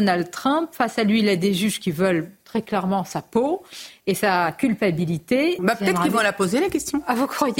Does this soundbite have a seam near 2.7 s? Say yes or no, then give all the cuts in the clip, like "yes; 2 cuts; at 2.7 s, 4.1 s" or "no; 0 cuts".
no; 1 cut; at 5.6 s